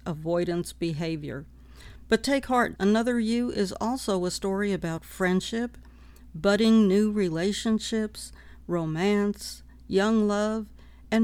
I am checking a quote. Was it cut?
yes; 1 cut; at 2.8 s

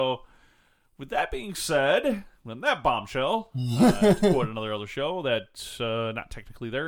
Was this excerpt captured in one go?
yes; 0 cuts

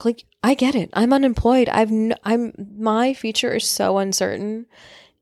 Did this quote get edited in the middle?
no; 0 cuts

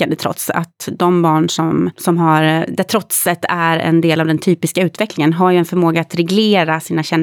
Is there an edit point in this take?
no; 0 cuts

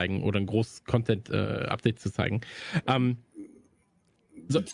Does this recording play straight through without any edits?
yes; 0 cuts

